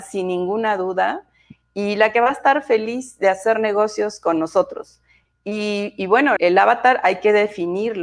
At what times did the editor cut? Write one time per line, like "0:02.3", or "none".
0:05.3
0:06.4